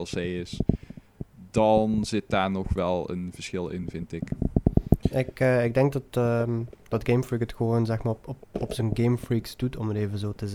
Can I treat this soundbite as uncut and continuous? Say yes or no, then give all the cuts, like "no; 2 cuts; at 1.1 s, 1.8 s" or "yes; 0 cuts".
yes; 0 cuts